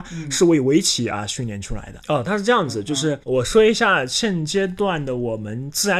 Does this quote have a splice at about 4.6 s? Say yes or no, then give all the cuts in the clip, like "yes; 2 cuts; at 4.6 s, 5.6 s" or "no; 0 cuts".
no; 2 cuts; at 2.0 s, 3.2 s